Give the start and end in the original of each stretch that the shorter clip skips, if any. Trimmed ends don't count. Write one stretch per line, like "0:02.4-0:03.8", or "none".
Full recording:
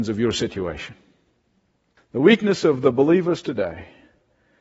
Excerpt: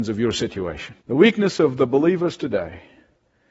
0:01.0-0:02.1